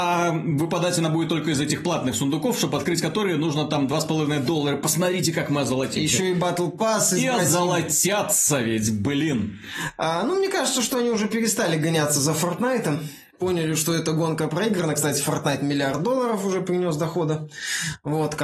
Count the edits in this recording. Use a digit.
0